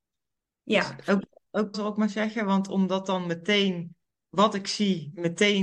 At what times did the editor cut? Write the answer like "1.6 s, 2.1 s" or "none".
1.7 s